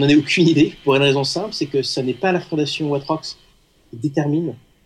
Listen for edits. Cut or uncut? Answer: uncut